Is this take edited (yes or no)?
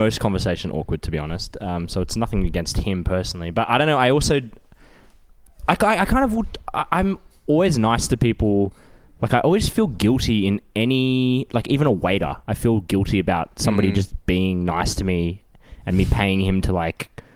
no